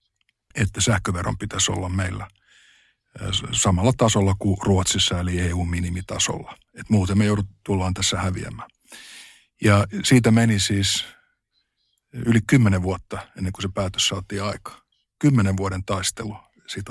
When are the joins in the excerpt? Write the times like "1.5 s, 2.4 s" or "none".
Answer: none